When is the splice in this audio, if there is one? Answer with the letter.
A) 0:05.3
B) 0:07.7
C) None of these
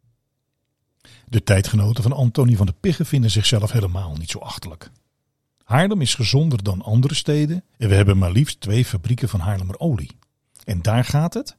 B